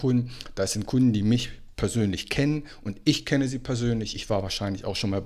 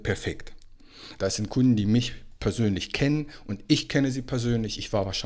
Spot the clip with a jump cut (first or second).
second